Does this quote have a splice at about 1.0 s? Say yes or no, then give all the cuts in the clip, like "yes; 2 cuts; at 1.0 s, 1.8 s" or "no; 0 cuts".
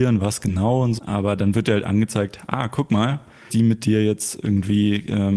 yes; 2 cuts; at 1.0 s, 3.5 s